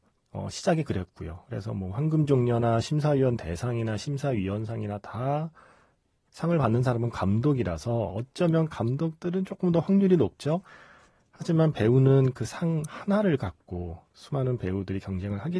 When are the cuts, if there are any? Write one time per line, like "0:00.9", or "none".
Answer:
0:08.1